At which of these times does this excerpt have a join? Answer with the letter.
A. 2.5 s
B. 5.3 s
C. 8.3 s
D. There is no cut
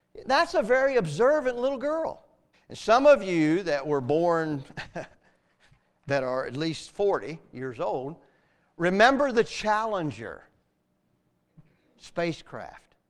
A